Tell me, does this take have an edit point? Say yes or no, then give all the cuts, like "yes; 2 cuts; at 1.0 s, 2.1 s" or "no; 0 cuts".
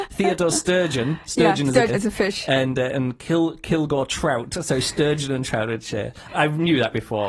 yes; 2 cuts; at 1.9 s, 6.3 s